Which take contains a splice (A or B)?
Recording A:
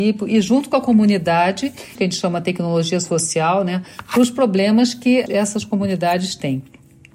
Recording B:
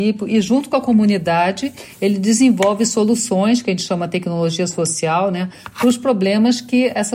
A